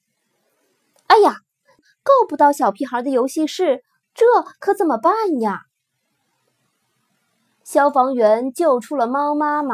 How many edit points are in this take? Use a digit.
1